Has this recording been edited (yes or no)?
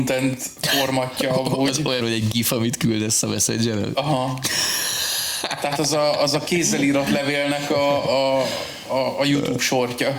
yes